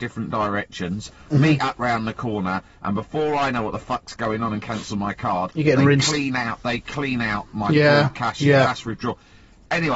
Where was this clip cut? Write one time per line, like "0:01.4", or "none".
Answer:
none